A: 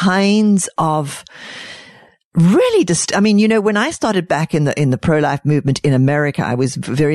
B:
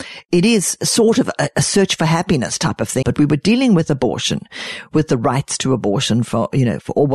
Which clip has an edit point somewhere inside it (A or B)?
B